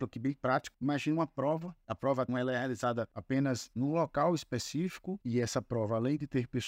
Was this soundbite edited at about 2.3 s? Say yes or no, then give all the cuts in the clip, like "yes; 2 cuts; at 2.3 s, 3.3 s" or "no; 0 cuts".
yes; 2 cuts; at 2.3 s, 5.2 s